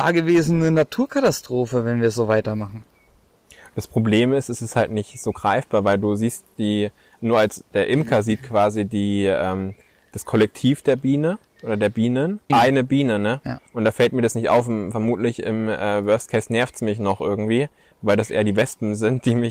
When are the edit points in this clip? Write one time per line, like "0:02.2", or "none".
0:12.5